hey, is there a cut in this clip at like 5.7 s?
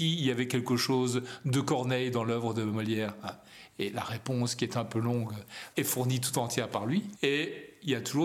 yes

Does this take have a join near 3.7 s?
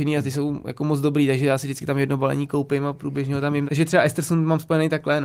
yes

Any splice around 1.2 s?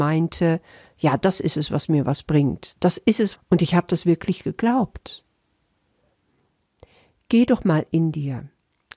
no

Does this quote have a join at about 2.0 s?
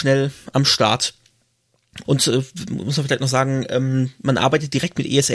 yes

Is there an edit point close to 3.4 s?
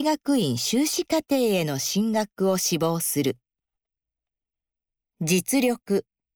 no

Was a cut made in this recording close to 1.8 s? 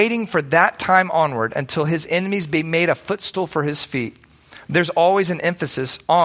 no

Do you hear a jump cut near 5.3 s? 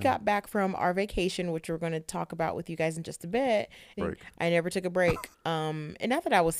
yes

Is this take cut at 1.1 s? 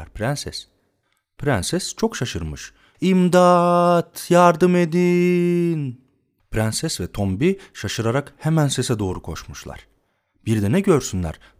no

